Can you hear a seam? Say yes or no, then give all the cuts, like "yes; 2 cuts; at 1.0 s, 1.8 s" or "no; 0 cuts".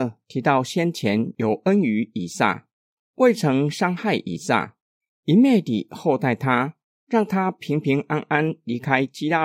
no; 0 cuts